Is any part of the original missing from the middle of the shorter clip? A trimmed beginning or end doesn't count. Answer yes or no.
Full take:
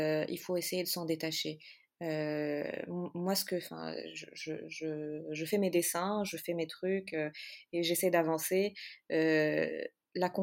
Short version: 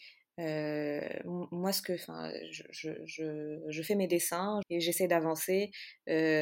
yes